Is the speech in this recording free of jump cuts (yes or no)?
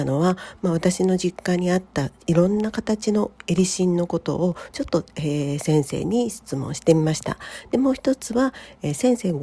yes